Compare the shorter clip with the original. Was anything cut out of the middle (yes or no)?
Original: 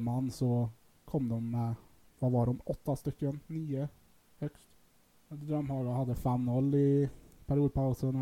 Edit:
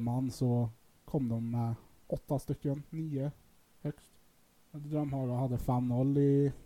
yes